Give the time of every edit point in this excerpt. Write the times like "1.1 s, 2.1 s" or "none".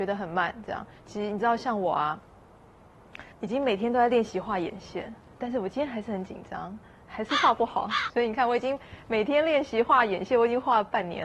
3.3 s, 8.1 s